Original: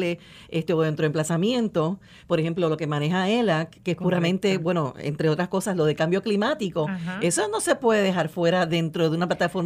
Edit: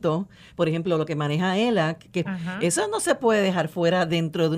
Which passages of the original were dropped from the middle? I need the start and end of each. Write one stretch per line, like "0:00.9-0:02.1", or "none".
0:04.0-0:06.9